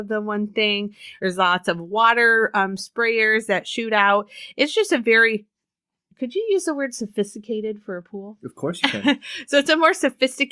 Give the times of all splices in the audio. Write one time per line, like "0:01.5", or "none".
none